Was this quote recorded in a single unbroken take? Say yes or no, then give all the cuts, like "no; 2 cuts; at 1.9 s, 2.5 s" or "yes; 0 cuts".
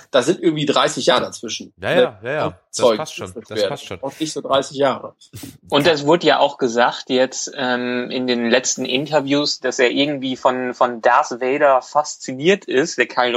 yes; 0 cuts